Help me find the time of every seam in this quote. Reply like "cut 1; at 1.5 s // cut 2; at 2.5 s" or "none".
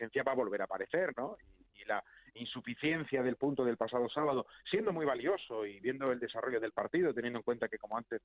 none